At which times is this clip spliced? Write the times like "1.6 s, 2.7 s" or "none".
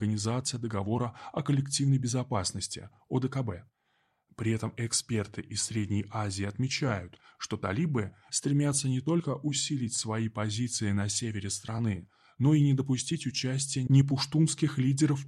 8.3 s